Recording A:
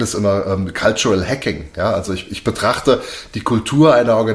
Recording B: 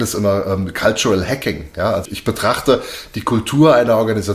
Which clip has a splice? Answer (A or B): B